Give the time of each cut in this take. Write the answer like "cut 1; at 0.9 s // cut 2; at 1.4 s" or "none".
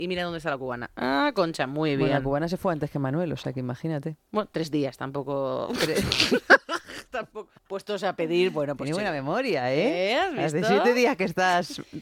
cut 1; at 7.6 s